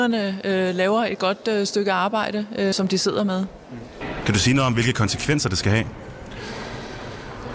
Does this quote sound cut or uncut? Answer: cut